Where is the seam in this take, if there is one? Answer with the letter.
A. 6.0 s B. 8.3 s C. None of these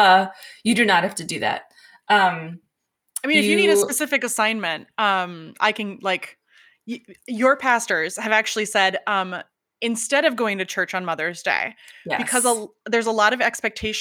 C